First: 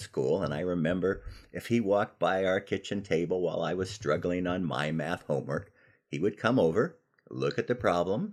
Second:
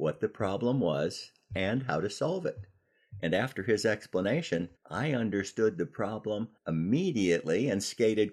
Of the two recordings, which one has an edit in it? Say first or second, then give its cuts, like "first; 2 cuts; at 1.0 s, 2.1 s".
second; 2 cuts; at 4.8 s, 6.6 s